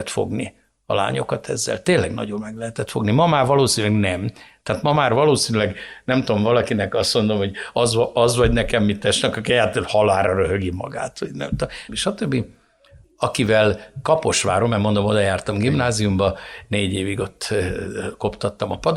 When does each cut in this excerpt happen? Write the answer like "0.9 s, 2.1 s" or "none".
11.9 s